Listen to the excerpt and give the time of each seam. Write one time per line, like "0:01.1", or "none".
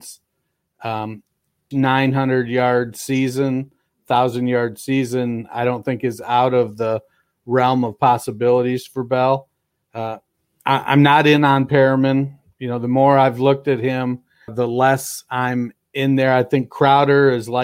0:01.7
0:14.5